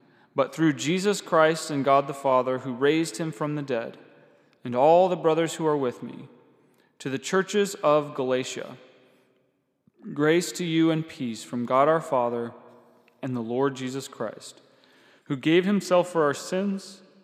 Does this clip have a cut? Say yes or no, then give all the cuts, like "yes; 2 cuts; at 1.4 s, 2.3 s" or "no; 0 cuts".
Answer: no; 0 cuts